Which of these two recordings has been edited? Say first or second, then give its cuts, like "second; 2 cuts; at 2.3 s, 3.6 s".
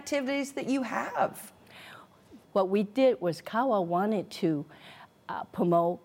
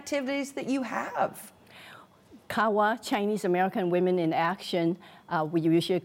first; 1 cut; at 2.4 s